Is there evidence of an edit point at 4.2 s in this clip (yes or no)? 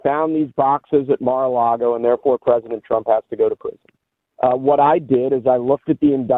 yes